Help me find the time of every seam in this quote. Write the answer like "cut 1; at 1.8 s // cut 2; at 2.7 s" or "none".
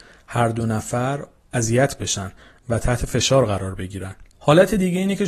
cut 1; at 4.3 s

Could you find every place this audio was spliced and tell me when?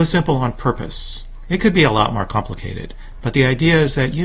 none

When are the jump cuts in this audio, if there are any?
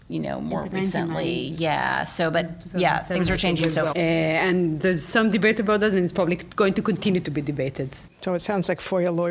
cut 1; at 3.9 s // cut 2; at 8.1 s

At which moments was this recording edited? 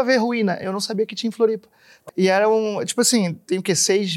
cut 1; at 2.1 s

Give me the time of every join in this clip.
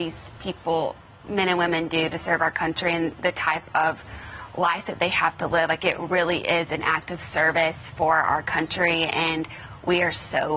none

